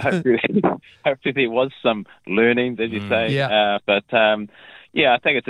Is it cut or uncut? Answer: cut